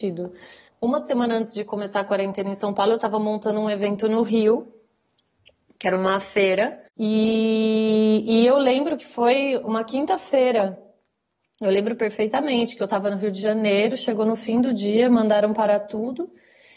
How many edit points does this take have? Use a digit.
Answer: 1